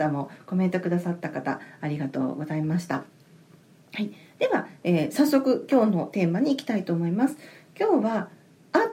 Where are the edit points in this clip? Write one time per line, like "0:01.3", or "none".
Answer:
none